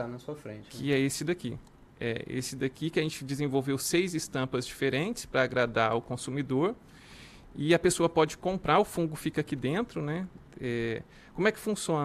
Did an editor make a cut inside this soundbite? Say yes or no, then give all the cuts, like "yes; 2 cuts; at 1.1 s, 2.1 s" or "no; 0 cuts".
no; 0 cuts